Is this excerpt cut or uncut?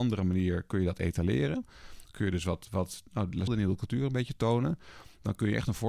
cut